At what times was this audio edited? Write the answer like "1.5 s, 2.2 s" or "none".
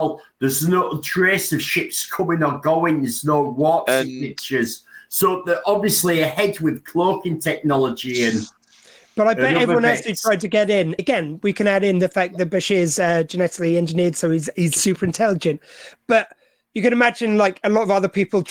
11.0 s

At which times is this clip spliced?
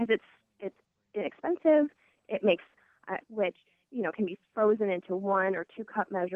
3.2 s

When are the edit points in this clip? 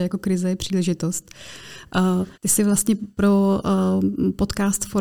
2.3 s

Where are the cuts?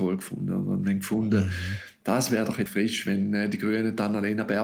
2.7 s

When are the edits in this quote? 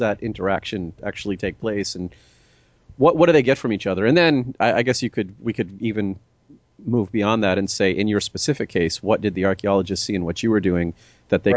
none

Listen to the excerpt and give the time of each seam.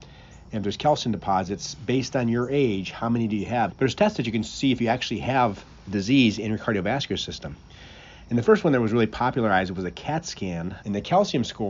3.7 s, 10.8 s

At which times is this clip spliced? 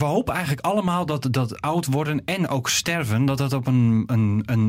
none

